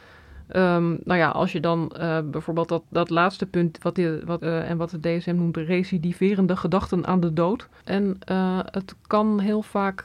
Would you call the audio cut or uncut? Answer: cut